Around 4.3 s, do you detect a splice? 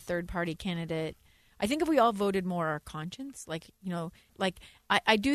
yes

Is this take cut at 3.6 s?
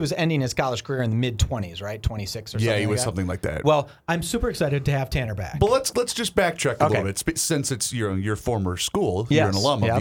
yes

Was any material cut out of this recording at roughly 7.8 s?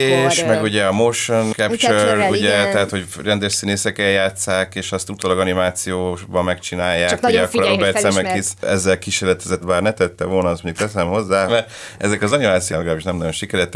no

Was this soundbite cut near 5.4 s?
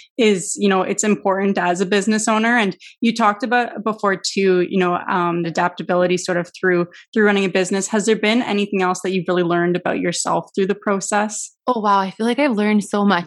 yes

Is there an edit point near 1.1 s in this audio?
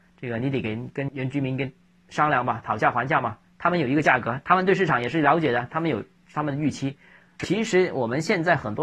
yes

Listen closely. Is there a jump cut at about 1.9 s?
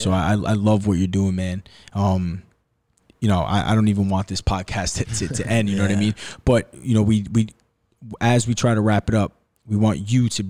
no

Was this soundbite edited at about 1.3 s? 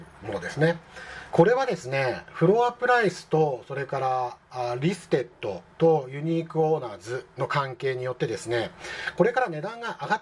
yes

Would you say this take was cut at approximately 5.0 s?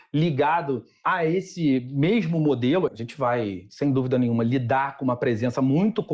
no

